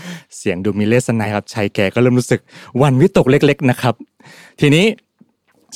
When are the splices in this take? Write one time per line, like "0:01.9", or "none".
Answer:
0:01.2